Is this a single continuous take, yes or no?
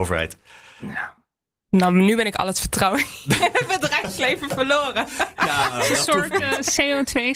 yes